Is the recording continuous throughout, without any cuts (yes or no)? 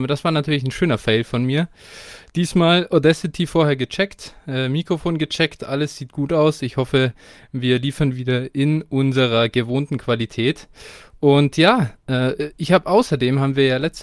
yes